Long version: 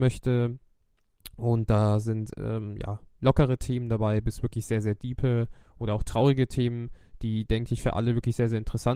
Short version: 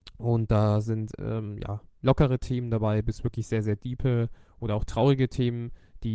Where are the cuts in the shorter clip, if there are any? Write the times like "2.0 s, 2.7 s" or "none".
none